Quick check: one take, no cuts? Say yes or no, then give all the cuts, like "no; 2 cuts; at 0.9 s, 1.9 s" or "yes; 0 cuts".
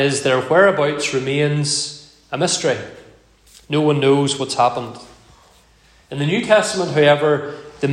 yes; 0 cuts